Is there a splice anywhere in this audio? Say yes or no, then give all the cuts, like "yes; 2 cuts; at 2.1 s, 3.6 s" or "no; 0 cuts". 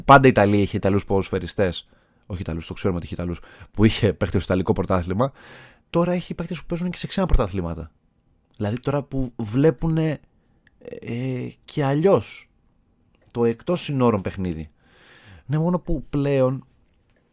yes; 2 cuts; at 5.8 s, 15.4 s